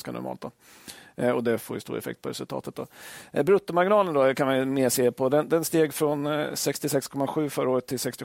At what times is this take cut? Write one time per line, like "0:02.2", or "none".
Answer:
none